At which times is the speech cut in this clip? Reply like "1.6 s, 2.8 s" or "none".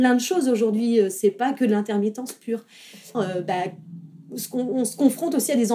3.1 s